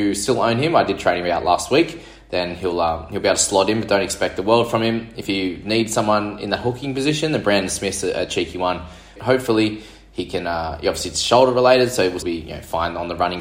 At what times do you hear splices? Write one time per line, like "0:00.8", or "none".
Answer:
0:09.2
0:12.2